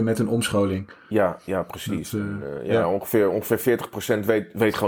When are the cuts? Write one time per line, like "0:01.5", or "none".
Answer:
none